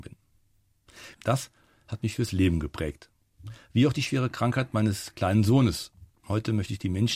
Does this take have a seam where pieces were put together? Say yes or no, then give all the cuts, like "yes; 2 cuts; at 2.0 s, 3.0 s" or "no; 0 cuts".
yes; 1 cut; at 1.1 s